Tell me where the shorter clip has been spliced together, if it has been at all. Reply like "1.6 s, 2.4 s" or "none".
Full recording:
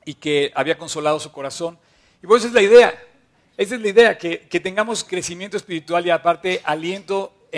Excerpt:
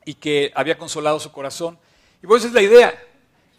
none

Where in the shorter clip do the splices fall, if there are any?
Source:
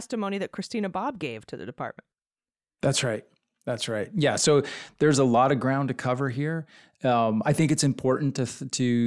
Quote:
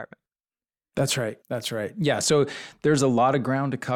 1.4 s

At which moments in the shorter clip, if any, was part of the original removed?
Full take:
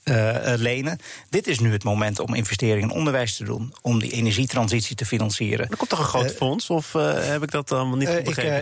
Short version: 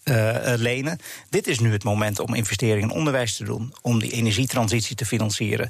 none

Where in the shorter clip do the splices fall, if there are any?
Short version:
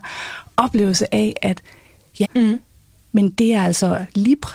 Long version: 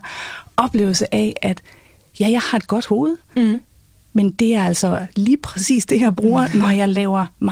2.2 s

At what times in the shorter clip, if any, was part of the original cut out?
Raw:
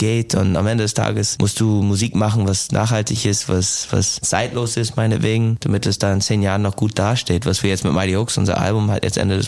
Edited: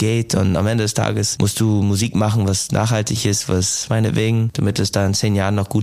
3.9 s

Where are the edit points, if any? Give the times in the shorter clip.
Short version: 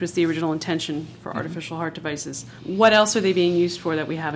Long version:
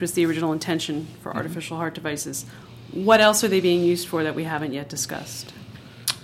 2.6 s

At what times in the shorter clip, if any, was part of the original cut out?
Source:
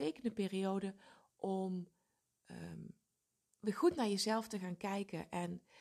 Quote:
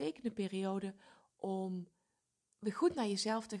2.4 s

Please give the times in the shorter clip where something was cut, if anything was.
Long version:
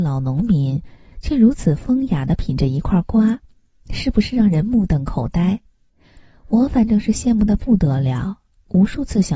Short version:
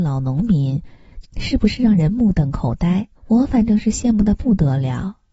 1.2 s, 3.2 s

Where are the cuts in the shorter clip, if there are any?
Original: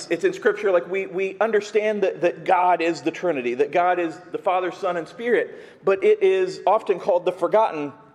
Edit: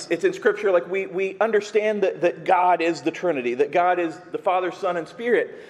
none

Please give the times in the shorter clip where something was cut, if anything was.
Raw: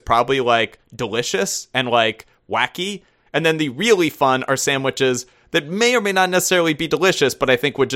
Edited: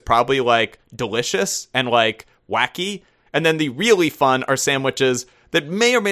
none

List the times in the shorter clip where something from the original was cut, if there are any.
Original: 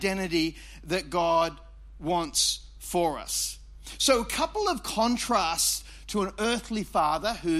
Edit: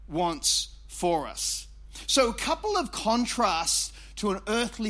none

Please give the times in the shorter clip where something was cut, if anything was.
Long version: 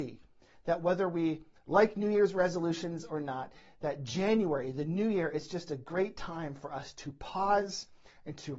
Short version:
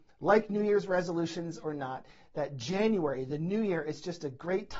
none

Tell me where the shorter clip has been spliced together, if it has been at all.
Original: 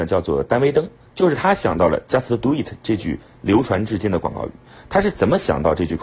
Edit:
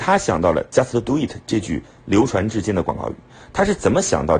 none

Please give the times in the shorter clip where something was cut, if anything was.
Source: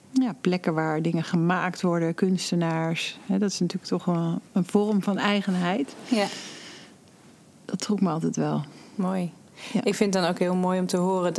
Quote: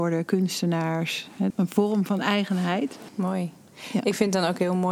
1.5 s, 3.1 s

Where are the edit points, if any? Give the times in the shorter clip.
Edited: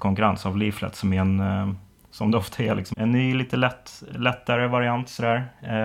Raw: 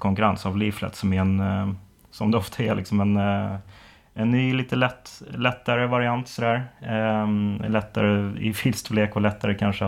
2.9 s

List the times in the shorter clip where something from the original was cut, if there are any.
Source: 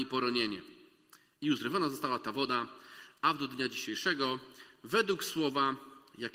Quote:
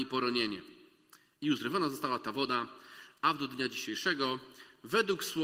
none

